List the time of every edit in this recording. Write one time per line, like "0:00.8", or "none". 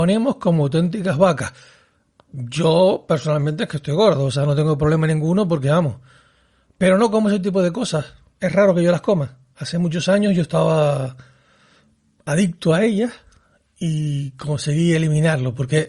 none